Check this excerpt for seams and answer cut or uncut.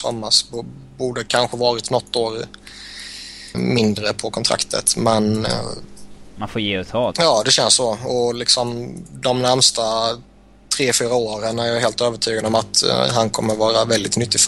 cut